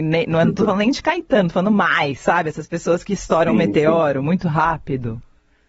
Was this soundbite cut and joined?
no; 0 cuts

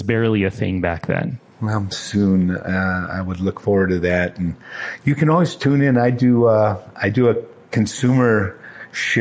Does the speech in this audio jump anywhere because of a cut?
yes; 1 cut; at 1.9 s

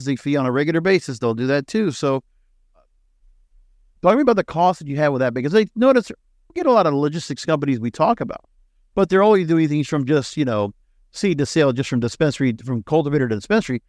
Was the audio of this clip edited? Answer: no; 0 cuts

